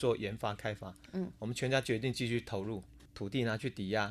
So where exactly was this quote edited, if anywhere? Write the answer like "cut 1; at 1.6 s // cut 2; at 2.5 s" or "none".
cut 1; at 1.1 s // cut 2; at 3.1 s